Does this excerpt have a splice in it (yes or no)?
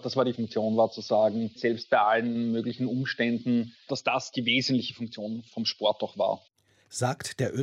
yes